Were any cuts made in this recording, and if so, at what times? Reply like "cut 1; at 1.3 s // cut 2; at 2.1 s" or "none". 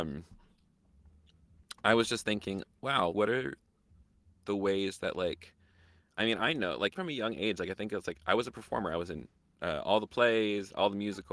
cut 1; at 3.1 s // cut 2; at 6.9 s